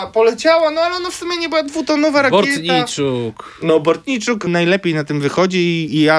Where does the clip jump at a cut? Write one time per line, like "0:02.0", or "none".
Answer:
0:04.5